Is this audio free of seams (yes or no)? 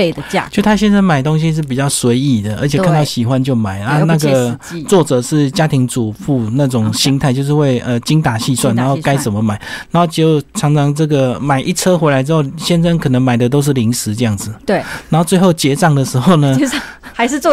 yes